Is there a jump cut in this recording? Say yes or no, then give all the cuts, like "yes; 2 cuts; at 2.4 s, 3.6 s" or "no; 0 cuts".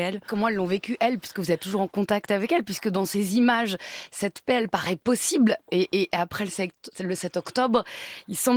no; 0 cuts